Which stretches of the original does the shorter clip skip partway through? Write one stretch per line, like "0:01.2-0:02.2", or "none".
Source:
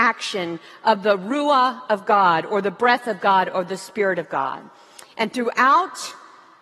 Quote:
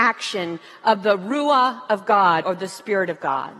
0:02.4-0:03.5

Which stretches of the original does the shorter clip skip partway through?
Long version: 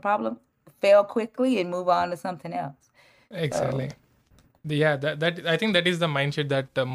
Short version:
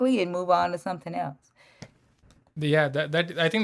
0:03.2-0:03.9

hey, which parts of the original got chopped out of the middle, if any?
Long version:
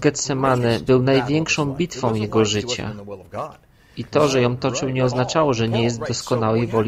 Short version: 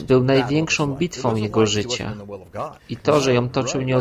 0:03.6-0:03.9

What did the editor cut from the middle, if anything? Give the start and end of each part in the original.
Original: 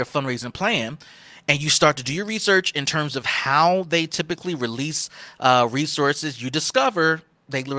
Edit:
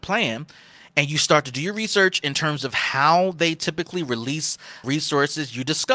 0:05.4-0:05.7

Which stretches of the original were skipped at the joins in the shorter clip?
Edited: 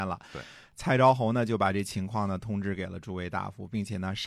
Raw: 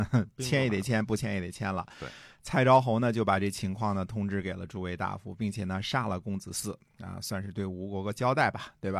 none

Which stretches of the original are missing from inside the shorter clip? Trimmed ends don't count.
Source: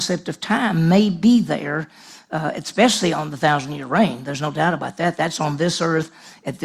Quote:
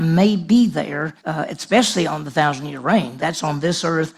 0:01.9-0:02.2
0:04.2-0:05.2

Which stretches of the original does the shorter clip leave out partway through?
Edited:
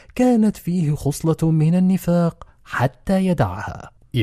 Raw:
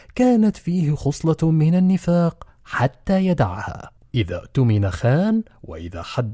none

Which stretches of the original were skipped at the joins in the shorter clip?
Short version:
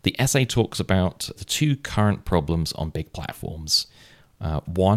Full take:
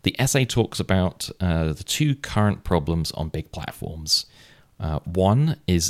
0:01.4-0:01.7

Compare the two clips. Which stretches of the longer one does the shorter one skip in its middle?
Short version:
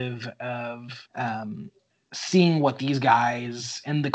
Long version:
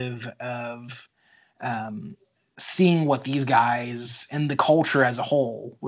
0:01.1-0:01.5

